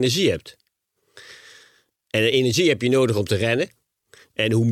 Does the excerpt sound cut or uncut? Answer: uncut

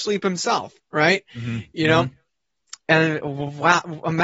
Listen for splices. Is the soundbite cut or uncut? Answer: uncut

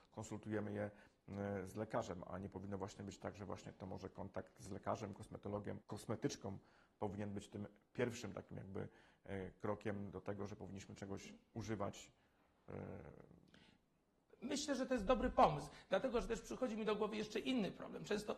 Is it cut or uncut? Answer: cut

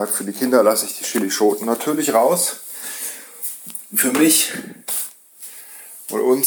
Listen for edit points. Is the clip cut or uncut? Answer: uncut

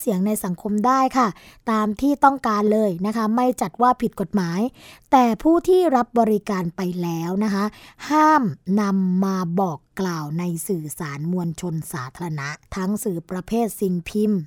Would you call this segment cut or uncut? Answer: cut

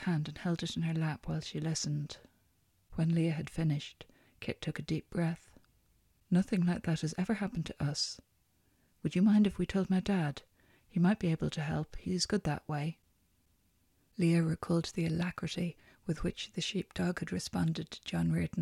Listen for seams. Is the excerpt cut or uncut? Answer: uncut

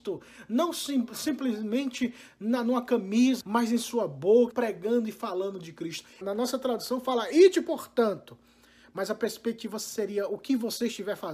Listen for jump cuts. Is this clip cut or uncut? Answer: cut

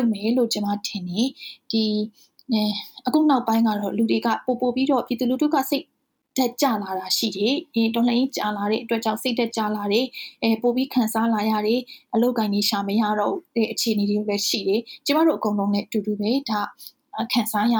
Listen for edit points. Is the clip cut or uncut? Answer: uncut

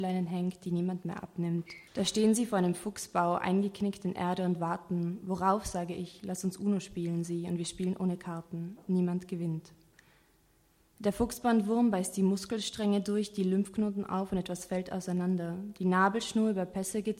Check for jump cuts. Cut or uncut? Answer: cut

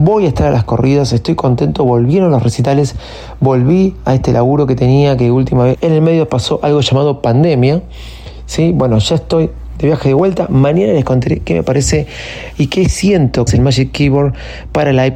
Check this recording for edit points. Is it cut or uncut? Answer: cut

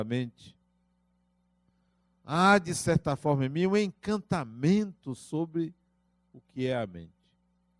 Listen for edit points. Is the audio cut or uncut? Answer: uncut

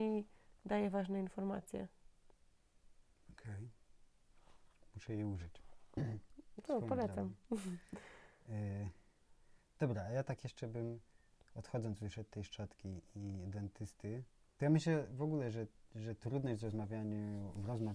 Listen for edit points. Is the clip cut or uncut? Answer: cut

